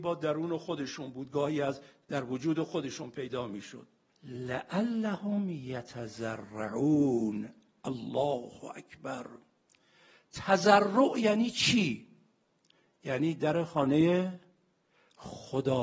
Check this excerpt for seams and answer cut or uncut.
cut